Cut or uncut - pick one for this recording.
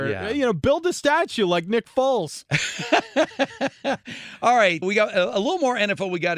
cut